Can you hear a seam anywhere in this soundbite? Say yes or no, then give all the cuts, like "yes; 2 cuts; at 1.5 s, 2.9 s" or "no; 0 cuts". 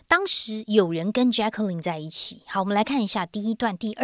no; 0 cuts